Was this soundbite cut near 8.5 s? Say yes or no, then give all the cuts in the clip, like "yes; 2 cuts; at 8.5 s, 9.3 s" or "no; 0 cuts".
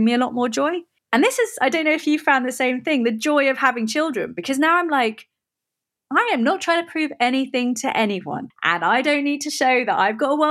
yes; 2 cuts; at 1.0 s, 8.5 s